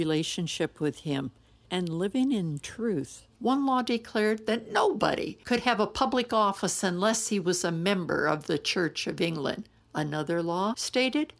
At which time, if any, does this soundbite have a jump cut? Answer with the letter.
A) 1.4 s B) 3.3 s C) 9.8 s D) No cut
B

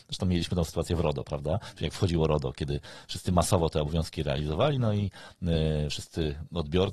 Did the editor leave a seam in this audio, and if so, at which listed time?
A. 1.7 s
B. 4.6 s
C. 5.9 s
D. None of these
D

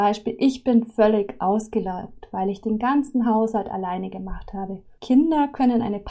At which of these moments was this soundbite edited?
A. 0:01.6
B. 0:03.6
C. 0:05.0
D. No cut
C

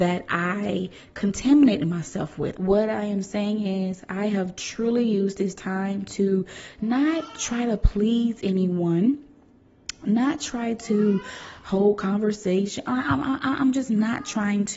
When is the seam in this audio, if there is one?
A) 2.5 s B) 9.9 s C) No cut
A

